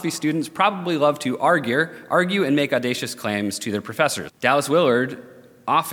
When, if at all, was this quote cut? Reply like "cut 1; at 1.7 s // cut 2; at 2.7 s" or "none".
cut 1; at 4.3 s